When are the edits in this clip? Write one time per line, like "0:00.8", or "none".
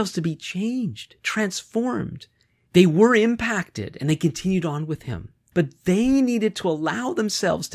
0:02.7
0:05.5